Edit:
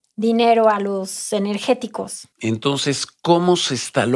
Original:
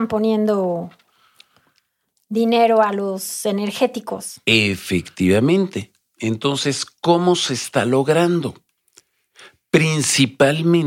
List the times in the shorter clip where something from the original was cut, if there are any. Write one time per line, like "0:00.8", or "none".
0:02.3